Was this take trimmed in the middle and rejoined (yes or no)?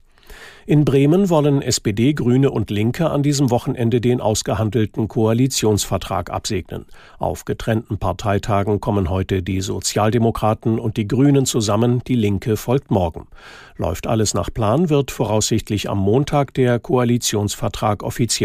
no